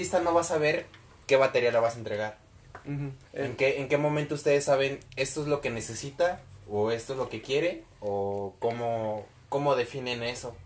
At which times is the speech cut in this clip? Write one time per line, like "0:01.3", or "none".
0:03.2